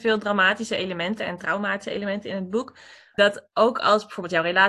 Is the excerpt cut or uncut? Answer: cut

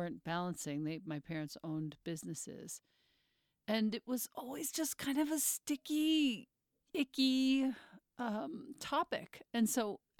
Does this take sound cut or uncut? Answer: uncut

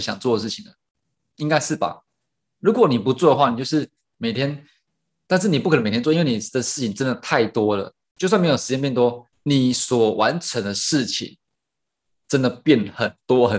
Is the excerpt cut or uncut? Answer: cut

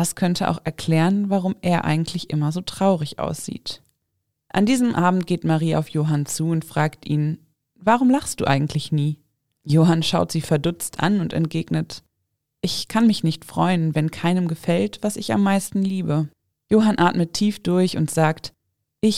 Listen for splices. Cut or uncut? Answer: cut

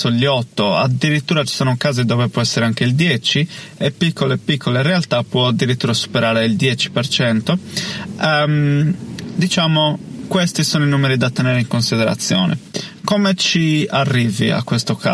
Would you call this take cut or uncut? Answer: cut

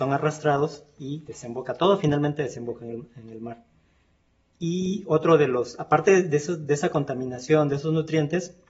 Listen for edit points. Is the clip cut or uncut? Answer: uncut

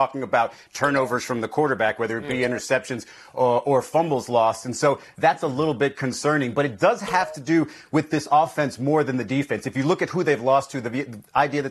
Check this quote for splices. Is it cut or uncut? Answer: uncut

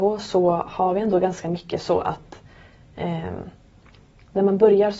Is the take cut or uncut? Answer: uncut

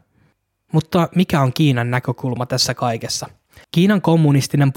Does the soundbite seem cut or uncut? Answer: cut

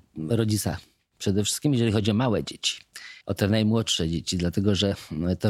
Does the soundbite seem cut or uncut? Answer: cut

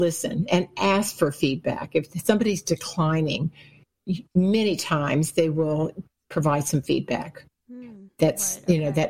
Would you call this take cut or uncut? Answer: uncut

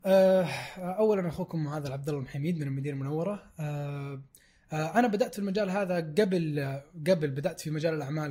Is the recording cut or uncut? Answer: uncut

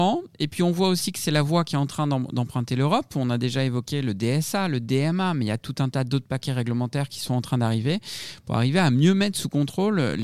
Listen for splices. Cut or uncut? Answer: uncut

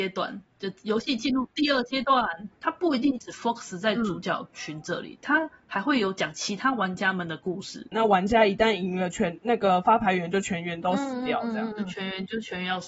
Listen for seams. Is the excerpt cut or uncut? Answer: cut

